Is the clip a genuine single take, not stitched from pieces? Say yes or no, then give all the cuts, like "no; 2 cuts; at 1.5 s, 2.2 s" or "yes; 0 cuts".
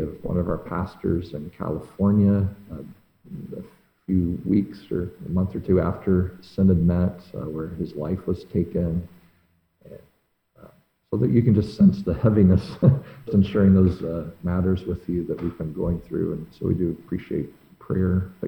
no; 1 cut; at 13.3 s